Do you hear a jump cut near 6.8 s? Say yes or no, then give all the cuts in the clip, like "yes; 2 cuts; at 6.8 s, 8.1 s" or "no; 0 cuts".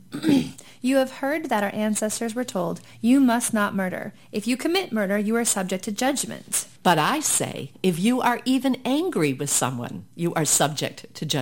yes; 1 cut; at 6.8 s